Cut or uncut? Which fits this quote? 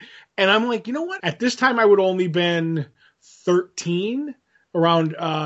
cut